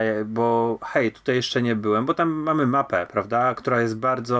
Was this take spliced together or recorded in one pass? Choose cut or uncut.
uncut